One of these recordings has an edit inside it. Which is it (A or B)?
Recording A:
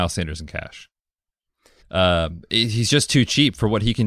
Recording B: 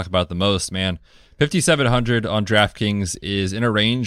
A